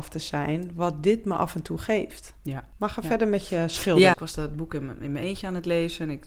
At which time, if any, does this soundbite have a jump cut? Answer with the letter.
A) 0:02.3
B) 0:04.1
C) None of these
B